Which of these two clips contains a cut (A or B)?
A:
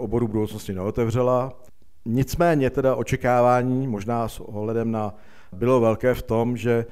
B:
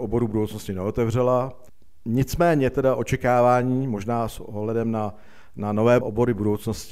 A